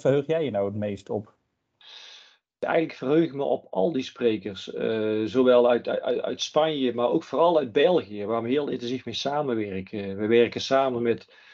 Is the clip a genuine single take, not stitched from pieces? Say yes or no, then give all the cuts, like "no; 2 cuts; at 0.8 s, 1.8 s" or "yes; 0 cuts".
yes; 0 cuts